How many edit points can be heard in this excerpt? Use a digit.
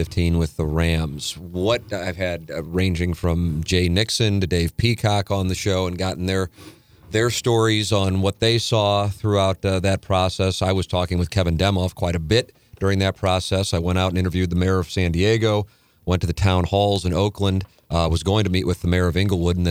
0